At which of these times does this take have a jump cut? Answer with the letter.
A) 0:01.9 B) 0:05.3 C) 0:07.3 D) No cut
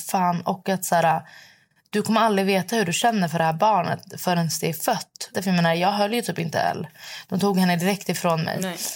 B